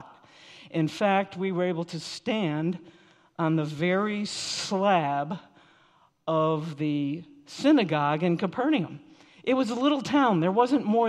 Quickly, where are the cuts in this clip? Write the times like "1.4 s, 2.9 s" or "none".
none